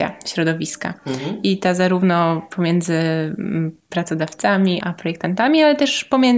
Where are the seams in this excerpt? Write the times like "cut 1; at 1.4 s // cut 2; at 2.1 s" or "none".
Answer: cut 1; at 4.8 s